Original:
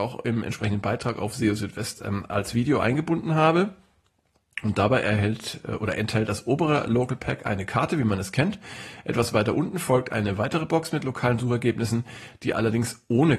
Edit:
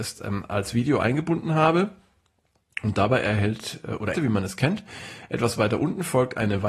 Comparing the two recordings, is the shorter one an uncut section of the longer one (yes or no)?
no